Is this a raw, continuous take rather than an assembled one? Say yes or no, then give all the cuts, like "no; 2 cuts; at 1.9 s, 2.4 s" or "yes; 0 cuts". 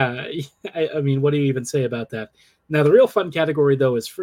yes; 0 cuts